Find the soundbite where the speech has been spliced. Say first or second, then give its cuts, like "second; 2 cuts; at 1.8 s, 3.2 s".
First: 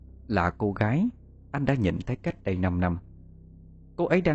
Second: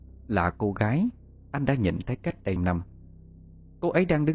second; 1 cut; at 2.6 s